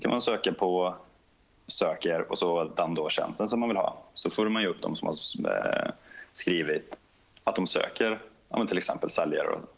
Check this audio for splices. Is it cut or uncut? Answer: uncut